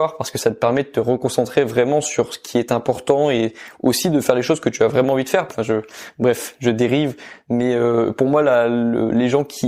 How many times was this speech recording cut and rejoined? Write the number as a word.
one